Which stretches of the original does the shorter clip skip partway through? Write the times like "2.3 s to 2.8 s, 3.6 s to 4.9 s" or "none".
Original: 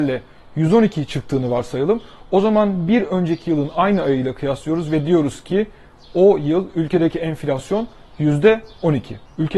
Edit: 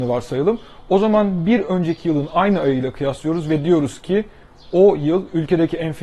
none